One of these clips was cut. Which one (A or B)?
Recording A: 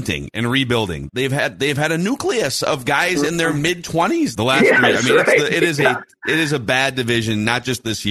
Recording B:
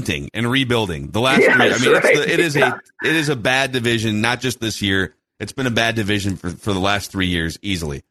A